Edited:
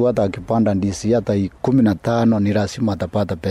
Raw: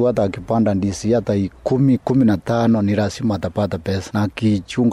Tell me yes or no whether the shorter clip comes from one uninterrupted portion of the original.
no